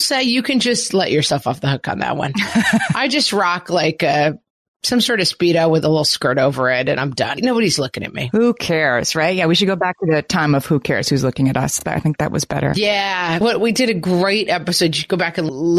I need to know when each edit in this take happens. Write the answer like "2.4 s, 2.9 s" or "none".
none

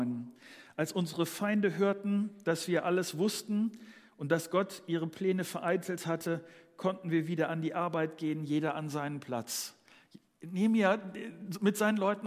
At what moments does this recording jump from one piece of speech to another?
none

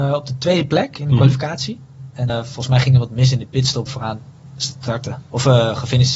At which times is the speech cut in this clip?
2.3 s, 3.9 s

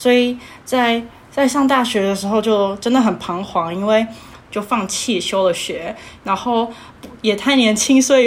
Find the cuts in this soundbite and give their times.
4.4 s

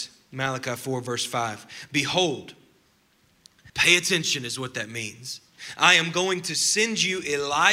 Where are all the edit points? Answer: 3.7 s

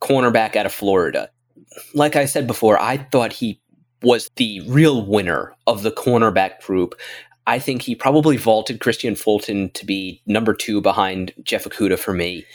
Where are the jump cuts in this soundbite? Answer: 4.3 s

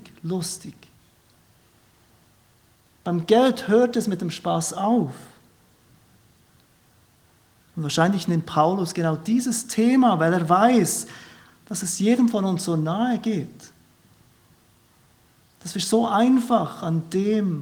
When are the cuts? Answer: none

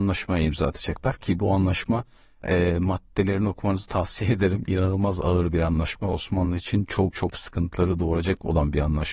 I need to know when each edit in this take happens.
7.1 s

